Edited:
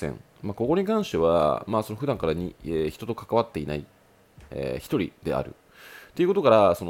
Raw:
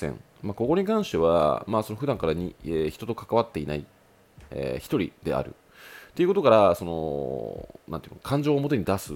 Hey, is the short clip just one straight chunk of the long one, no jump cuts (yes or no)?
yes